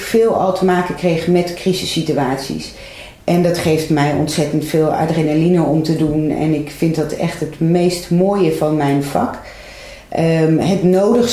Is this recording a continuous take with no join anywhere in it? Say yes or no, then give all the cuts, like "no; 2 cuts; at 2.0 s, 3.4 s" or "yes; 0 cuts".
yes; 0 cuts